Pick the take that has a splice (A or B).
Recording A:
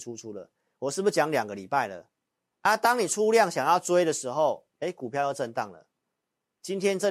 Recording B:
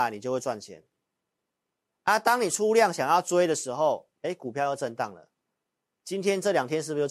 A